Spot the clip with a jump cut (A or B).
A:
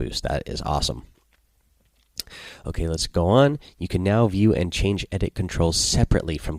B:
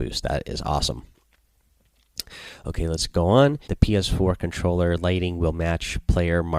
B